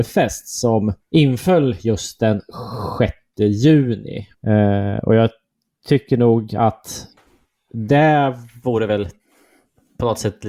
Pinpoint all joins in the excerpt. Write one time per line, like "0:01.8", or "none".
0:01.0
0:04.3